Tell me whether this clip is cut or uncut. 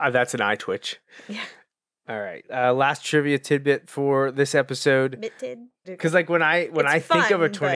cut